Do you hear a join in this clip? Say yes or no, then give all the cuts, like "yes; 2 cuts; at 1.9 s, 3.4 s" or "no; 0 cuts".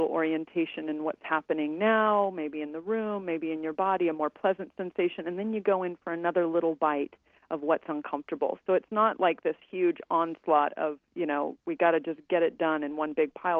no; 0 cuts